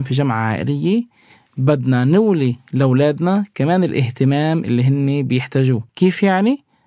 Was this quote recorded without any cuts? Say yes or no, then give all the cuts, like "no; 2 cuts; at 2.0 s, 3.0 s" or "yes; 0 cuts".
no; 1 cut; at 5.9 s